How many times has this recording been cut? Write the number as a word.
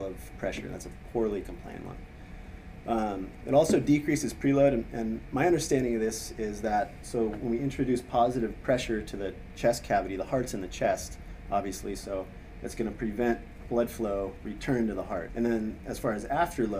one